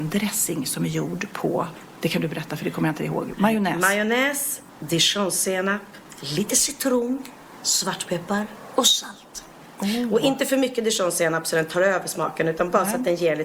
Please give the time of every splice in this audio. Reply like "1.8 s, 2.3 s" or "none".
none